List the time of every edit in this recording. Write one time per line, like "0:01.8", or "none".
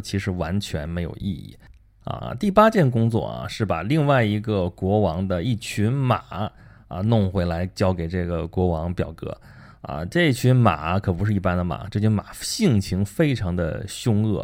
0:02.2